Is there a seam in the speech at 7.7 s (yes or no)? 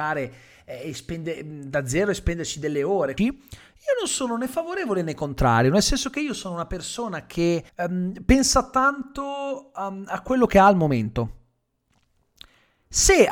yes